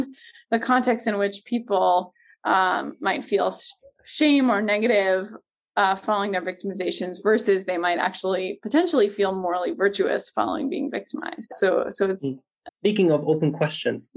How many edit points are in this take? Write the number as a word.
two